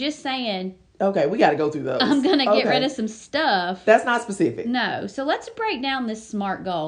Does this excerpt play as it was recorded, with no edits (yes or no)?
yes